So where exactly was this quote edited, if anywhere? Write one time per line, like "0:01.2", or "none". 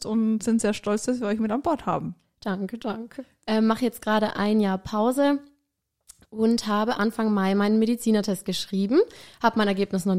0:03.4